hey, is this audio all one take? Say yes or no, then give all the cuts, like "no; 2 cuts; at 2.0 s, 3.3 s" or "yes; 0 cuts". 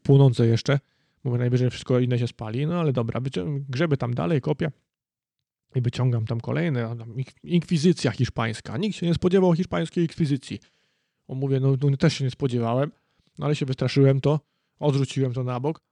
yes; 0 cuts